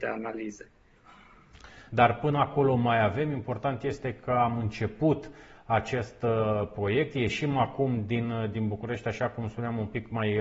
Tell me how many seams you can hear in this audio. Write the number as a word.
one